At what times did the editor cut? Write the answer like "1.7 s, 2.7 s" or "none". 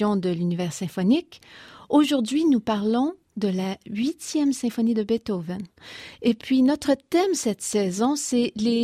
none